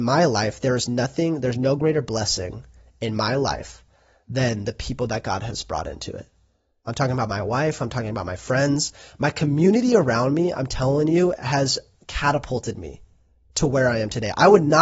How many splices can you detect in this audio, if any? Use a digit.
0